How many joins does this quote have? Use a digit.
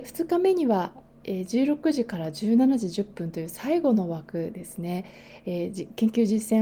0